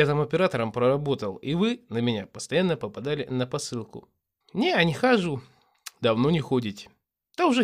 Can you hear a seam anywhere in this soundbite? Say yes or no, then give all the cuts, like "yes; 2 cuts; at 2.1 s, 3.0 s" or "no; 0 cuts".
yes; 1 cut; at 4.4 s